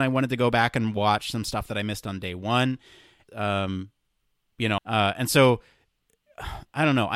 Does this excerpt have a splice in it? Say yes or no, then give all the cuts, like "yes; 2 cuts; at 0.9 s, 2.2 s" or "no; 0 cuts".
yes; 2 cuts; at 3.3 s, 4.8 s